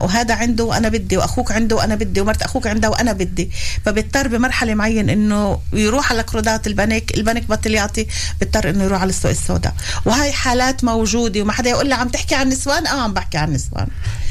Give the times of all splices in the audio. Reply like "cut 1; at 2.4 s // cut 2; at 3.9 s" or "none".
none